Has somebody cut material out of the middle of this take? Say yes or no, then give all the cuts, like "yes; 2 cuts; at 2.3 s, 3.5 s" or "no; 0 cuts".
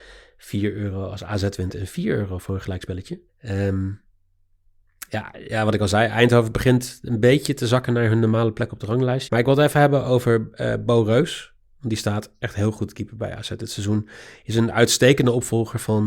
yes; 2 cuts; at 3.3 s, 9.3 s